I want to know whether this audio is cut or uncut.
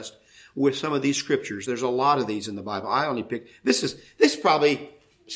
uncut